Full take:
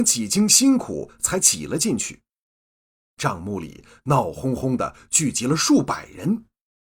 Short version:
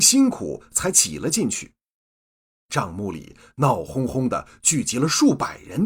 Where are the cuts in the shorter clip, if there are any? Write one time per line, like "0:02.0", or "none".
none